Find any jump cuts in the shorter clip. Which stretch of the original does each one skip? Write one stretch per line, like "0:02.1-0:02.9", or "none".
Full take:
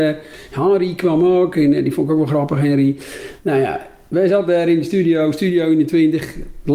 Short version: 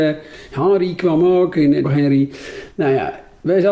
0:01.8-0:02.5